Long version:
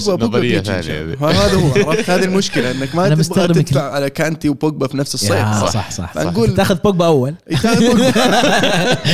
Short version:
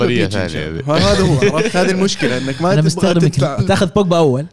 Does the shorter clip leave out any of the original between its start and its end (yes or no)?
yes